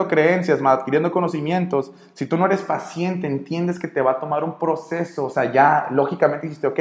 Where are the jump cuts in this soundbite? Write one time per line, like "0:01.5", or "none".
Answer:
none